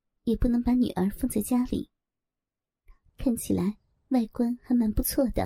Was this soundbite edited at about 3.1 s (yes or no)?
yes